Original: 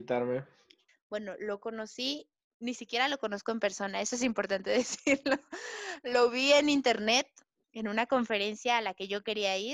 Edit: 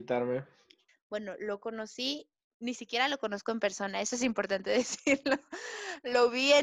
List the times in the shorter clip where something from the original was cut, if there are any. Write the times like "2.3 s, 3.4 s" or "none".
none